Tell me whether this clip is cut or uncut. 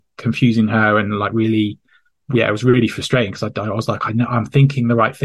uncut